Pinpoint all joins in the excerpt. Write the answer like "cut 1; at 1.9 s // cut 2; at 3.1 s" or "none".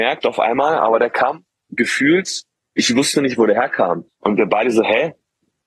cut 1; at 4.1 s